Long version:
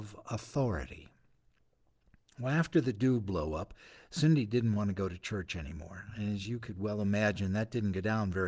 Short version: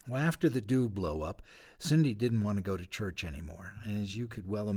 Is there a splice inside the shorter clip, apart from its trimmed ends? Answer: no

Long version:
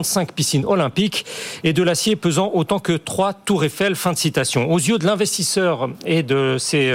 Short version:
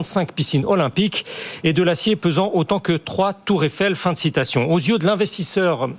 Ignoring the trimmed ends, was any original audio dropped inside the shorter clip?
no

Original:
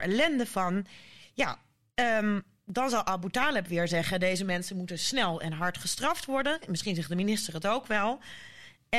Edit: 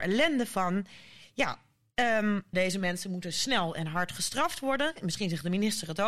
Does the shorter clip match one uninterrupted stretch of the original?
no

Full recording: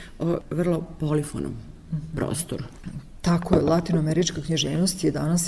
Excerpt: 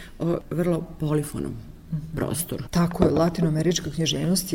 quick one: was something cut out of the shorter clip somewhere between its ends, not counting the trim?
yes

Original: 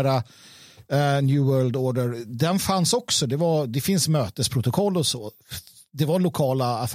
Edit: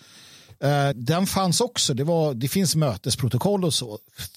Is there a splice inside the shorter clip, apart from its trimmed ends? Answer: yes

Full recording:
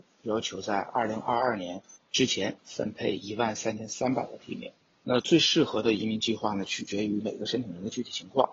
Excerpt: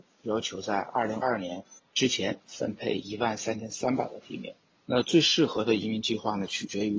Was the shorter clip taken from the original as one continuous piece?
no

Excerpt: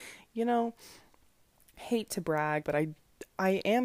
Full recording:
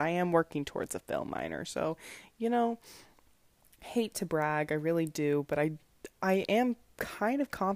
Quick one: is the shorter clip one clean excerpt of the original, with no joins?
no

